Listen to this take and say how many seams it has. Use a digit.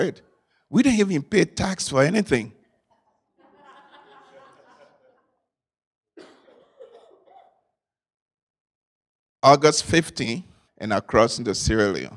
1